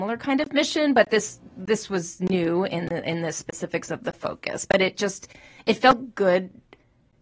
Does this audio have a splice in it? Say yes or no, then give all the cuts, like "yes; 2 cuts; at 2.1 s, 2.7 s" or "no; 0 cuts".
no; 0 cuts